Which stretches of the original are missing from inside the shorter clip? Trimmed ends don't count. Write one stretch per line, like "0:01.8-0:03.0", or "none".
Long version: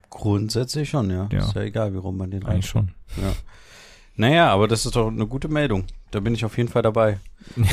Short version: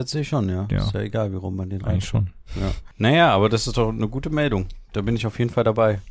0:03.5-0:04.1